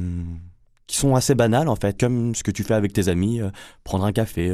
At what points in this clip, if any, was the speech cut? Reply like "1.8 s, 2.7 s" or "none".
2.0 s